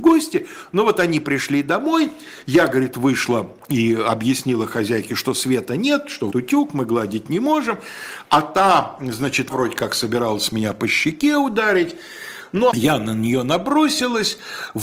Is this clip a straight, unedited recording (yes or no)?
no